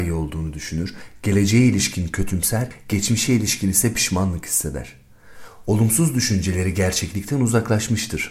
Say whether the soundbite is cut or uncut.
uncut